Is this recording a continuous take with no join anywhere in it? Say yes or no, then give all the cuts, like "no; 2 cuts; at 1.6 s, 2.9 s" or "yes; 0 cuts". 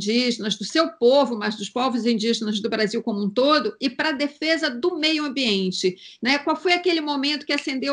yes; 0 cuts